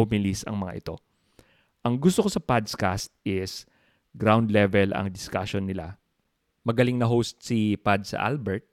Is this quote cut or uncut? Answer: uncut